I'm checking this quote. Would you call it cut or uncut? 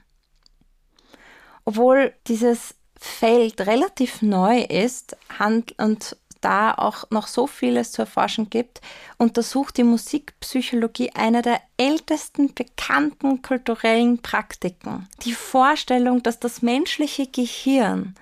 cut